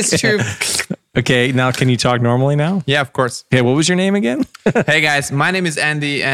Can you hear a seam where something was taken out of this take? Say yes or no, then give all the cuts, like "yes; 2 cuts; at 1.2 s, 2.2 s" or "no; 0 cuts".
no; 0 cuts